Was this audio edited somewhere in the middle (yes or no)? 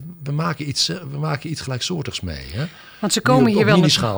no